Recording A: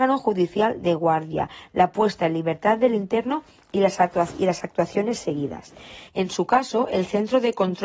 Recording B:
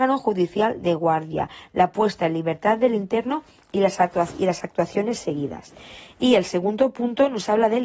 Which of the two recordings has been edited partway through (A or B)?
A